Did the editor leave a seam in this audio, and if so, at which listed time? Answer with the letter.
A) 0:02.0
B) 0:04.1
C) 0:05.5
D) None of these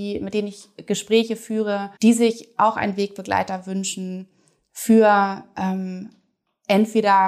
A